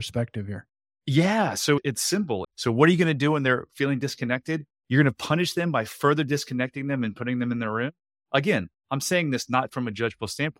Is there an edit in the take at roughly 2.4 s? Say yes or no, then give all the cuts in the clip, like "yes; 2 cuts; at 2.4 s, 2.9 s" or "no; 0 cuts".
yes; 1 cut; at 2.4 s